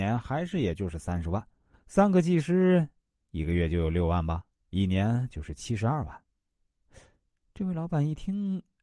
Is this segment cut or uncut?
cut